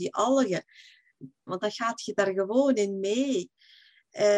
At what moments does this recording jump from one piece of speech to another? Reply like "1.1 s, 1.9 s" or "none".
1.5 s